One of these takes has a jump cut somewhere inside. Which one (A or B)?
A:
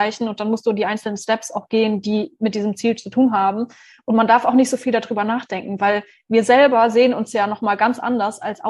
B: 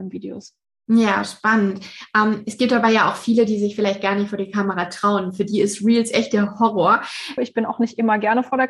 B